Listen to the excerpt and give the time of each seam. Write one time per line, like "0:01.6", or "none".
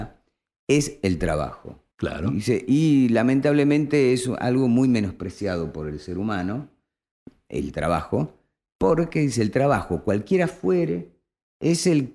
0:01.9